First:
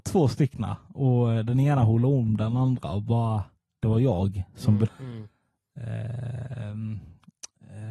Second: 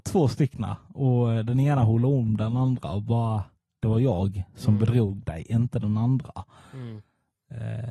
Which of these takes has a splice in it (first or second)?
first